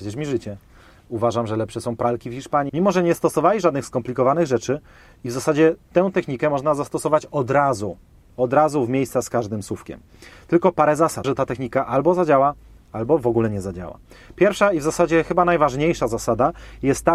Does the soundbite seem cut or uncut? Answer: cut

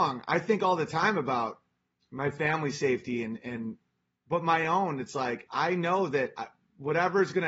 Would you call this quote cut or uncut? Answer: uncut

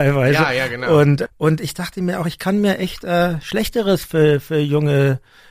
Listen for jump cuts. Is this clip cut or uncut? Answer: cut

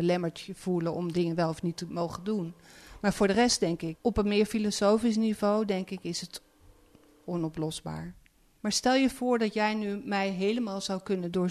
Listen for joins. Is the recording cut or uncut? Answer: cut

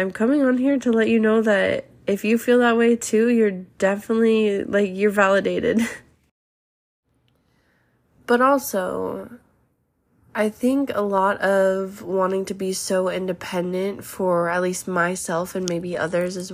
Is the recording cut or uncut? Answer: uncut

